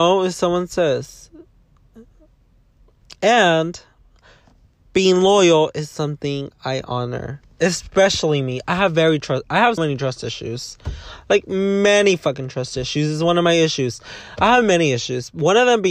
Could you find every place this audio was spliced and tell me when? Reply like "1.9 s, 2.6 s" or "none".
9.8 s

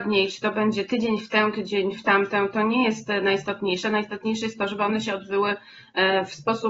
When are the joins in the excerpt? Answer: none

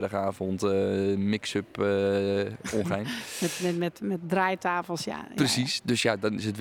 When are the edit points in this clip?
none

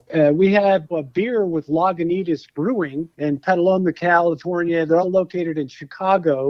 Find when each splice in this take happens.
0.9 s, 3.1 s, 5.0 s

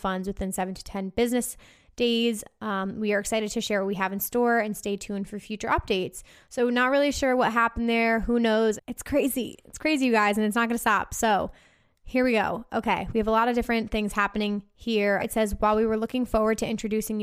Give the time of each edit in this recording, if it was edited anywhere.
8.8 s, 15.2 s

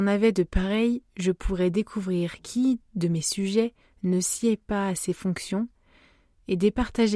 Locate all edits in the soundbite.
none

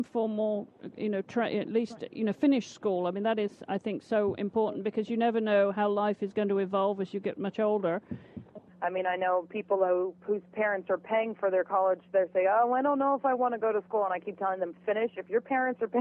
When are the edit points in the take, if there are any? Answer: 8.7 s

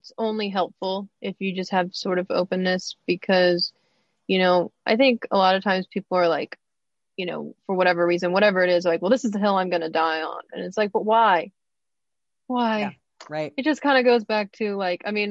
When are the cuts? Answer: none

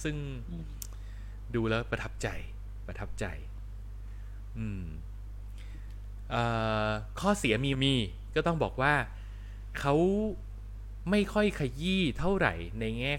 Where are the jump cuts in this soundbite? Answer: 7.7 s

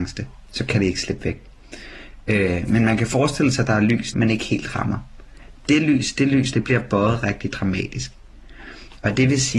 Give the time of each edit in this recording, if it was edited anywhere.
4.1 s, 6.5 s

